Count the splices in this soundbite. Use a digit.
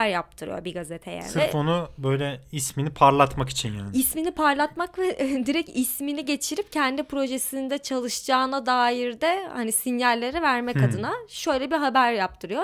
0